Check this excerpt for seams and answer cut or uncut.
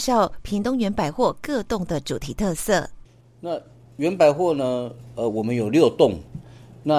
uncut